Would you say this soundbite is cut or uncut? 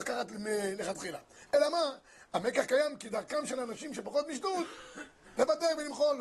uncut